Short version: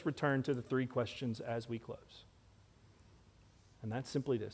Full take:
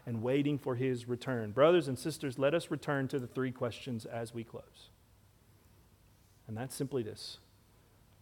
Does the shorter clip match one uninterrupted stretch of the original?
yes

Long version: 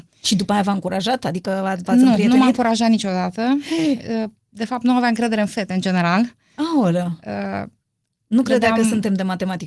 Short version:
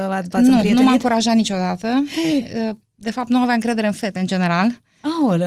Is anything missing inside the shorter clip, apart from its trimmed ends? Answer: no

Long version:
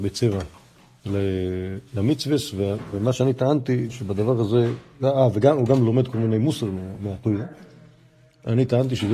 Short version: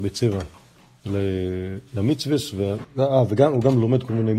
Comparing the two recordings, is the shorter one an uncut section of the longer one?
no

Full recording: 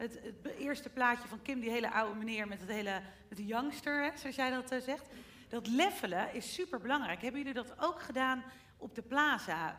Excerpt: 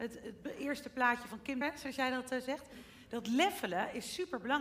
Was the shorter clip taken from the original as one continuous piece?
no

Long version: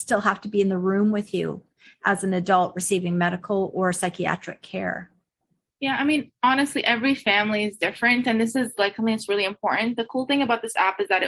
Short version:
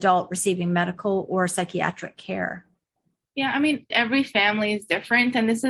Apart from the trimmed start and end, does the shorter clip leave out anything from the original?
yes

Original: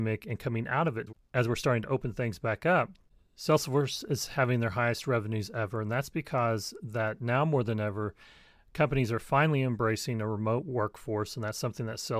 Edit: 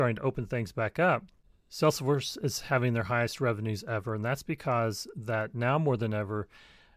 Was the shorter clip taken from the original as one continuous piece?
yes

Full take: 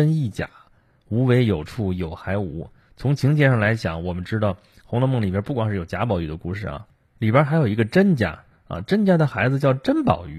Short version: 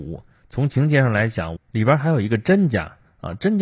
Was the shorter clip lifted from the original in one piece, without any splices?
no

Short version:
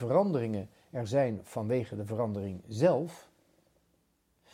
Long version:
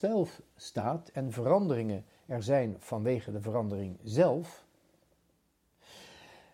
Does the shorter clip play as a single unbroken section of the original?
yes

